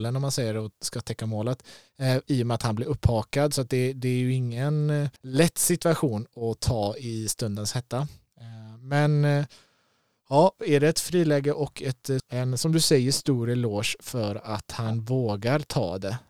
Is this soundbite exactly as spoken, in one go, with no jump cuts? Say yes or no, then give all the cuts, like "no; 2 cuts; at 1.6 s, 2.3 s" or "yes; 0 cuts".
no; 2 cuts; at 5.2 s, 12.2 s